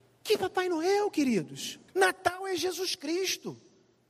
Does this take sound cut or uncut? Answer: cut